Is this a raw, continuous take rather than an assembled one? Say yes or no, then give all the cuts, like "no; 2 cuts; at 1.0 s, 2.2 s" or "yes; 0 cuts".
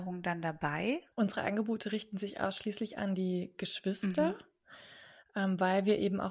no; 1 cut; at 1.1 s